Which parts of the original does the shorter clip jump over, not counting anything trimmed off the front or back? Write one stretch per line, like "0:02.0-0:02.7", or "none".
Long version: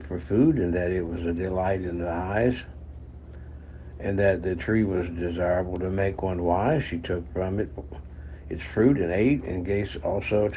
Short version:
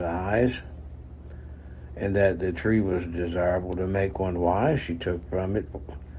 none